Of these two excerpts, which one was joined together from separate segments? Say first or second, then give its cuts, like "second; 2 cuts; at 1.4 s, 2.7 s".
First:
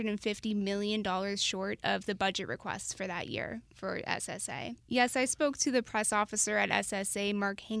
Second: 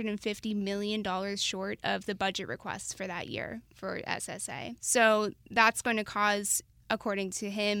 first; 1 cut; at 4.8 s